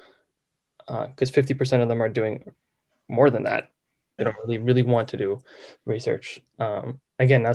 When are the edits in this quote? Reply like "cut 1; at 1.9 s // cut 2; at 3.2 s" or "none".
cut 1; at 4.2 s